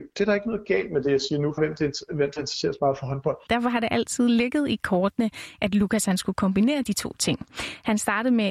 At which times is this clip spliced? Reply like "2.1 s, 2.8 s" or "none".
1.6 s, 3.5 s